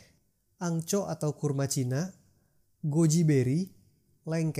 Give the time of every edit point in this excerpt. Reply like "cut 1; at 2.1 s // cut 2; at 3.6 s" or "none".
none